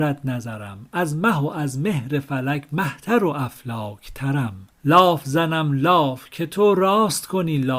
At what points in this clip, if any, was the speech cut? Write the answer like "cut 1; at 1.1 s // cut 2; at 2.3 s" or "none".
cut 1; at 4.7 s